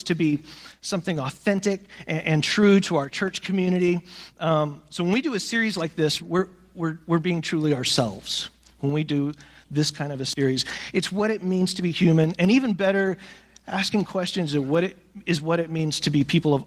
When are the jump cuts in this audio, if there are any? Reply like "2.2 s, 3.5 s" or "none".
6.2 s